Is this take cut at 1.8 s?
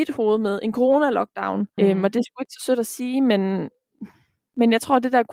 yes; 1 cut; at 1.8 s

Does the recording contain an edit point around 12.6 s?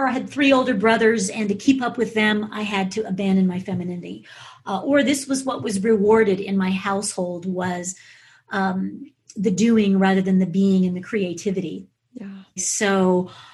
yes; 1 cut; at 12.6 s

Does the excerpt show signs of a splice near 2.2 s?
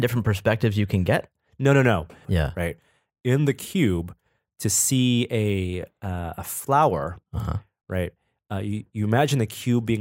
yes; 1 cut; at 2.2 s

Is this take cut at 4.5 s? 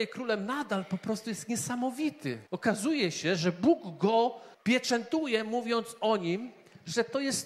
yes; 2 cuts; at 2.5 s, 4.5 s

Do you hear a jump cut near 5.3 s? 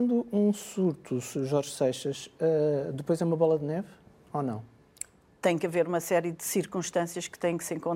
yes; 1 cut; at 5.3 s

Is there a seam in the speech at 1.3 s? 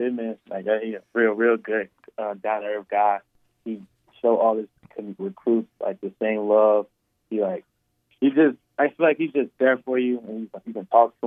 no; 1 cut; at 5.2 s

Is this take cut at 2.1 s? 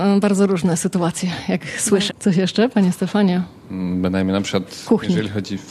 yes; 1 cut; at 2.1 s

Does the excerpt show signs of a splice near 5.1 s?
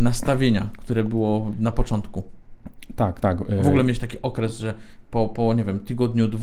no; 0 cuts

